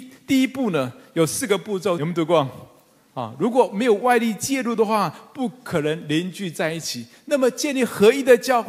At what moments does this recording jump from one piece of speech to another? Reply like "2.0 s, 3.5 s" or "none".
2.0 s